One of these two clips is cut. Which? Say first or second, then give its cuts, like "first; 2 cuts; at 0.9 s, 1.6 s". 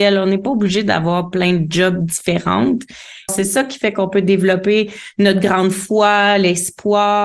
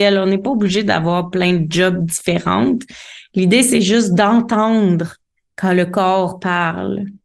first; 1 cut; at 3.3 s